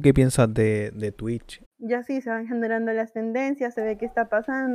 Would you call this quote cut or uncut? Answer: cut